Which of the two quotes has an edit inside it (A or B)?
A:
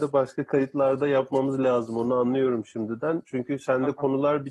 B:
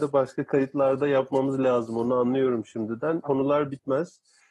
B